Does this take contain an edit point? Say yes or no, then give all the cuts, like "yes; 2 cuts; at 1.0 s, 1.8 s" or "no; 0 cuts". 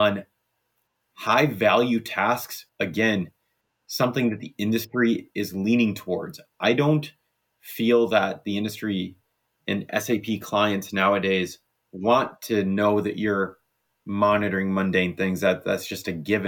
yes; 1 cut; at 2.7 s